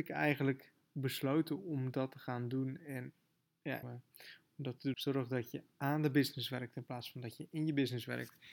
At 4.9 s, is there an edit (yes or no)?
yes